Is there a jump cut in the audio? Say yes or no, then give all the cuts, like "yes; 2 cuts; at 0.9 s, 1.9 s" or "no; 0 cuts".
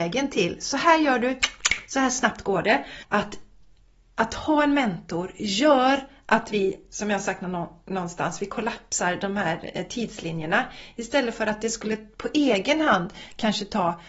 yes; 1 cut; at 3.0 s